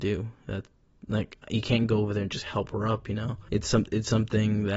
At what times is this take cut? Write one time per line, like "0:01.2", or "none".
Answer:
none